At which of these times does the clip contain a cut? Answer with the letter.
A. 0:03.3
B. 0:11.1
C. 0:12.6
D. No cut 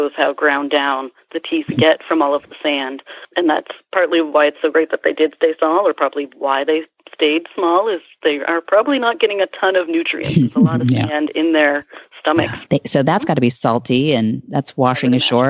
C